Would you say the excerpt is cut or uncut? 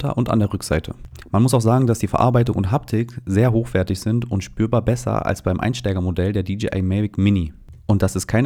uncut